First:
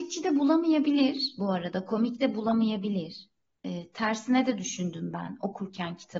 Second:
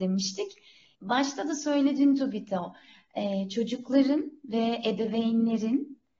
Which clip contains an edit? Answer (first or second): second